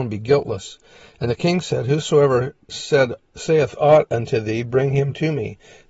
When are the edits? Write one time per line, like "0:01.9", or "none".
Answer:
none